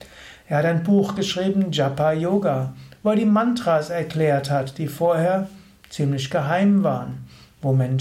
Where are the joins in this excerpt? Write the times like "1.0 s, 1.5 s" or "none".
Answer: none